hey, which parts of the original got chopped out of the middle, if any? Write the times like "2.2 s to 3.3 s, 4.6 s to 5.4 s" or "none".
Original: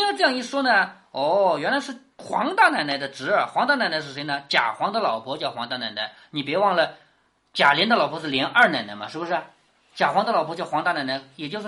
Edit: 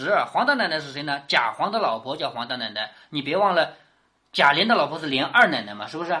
none